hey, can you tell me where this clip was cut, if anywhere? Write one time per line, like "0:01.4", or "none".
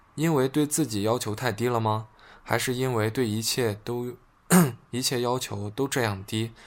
none